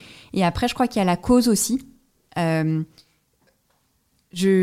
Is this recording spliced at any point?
no; 0 cuts

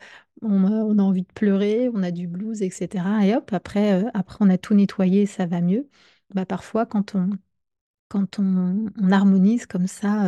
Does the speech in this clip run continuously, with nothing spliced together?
yes; 0 cuts

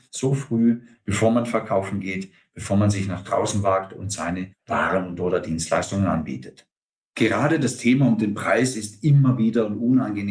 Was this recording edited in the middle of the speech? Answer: yes; 1 cut; at 1.0 s

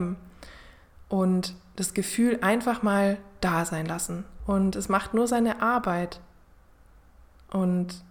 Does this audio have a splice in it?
yes; 1 cut; at 4.4 s

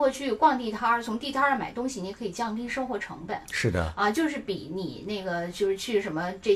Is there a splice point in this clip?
no; 0 cuts

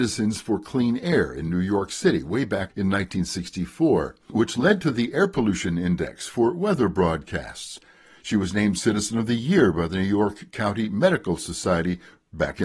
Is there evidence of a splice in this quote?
no; 0 cuts

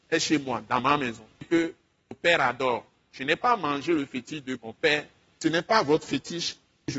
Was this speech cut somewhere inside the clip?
yes; 1 cut; at 4.6 s

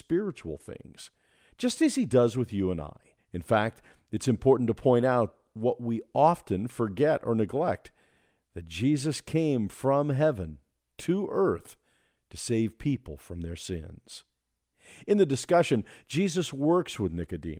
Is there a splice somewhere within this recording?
yes; 1 cut; at 3.2 s

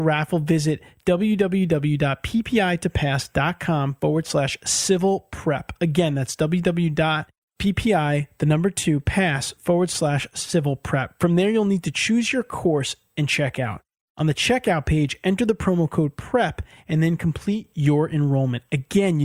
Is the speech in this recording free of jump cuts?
yes; 0 cuts

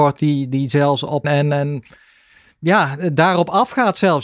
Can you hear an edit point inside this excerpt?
yes; 1 cut; at 1.2 s

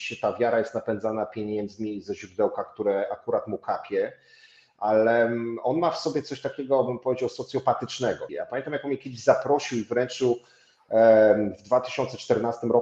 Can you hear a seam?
yes; 1 cut; at 8.3 s

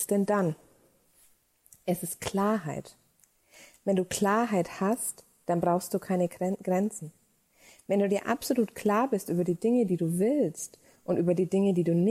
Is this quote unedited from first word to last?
yes; 0 cuts

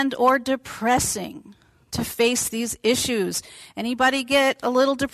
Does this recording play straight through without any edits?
yes; 0 cuts

